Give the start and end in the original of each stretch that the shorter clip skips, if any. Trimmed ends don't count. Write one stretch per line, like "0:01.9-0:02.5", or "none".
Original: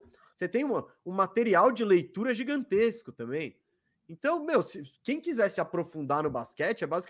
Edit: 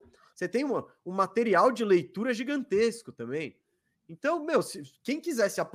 none